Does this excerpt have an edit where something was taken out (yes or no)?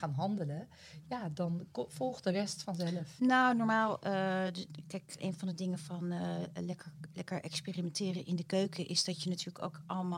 yes